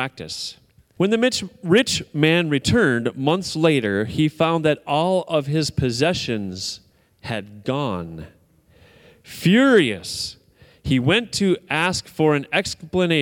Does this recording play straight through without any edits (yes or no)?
no